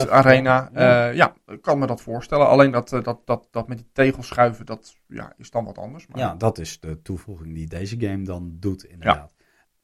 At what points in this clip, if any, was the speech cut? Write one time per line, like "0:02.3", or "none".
none